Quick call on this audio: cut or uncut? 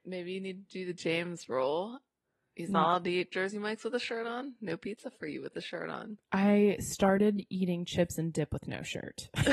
uncut